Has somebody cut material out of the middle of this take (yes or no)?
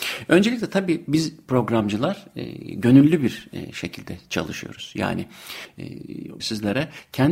yes